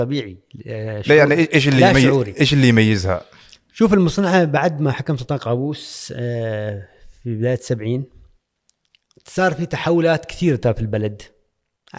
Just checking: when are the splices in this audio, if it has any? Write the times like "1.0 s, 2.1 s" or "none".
none